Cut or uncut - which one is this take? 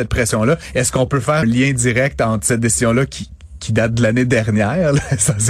cut